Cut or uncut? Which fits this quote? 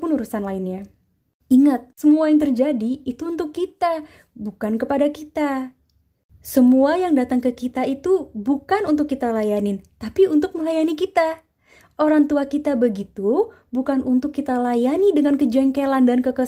uncut